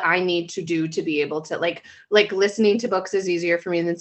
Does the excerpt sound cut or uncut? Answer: uncut